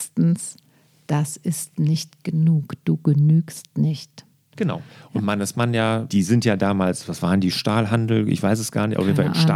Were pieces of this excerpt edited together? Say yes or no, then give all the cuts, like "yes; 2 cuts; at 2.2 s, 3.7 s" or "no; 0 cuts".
yes; 3 cuts; at 4.5 s, 6.1 s, 7.5 s